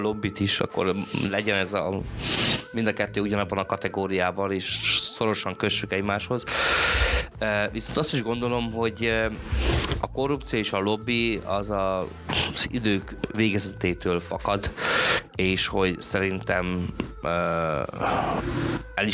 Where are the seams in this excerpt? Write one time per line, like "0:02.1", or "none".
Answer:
none